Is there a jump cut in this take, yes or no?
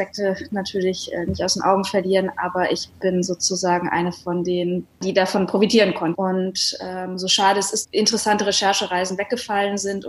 yes